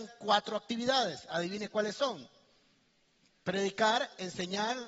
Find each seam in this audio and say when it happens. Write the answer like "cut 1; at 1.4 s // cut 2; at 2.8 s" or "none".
none